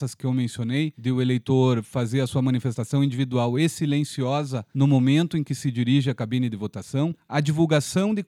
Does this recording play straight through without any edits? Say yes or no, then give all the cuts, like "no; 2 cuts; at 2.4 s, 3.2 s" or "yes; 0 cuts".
yes; 0 cuts